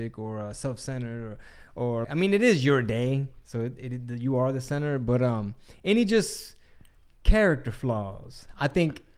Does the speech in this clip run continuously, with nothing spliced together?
no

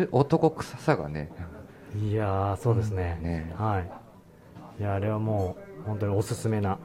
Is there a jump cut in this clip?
no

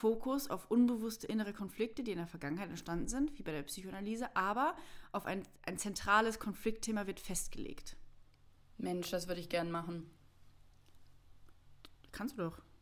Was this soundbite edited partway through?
yes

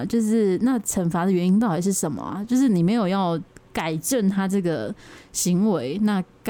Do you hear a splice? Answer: no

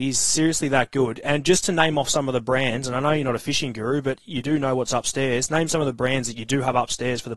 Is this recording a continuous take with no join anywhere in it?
yes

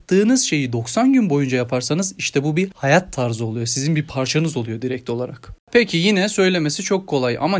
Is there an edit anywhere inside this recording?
no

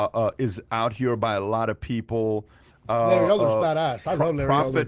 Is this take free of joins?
no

